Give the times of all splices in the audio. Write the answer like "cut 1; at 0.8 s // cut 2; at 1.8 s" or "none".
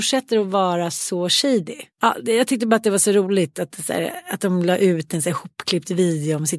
cut 1; at 1.9 s